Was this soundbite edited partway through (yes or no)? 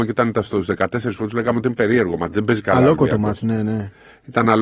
no